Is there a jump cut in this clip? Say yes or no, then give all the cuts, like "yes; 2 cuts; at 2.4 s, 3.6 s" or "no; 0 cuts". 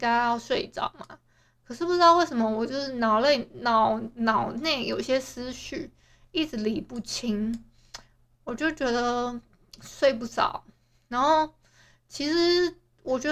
no; 0 cuts